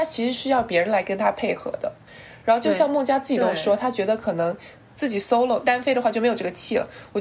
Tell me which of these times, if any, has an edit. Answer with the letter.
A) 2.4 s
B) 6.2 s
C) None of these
C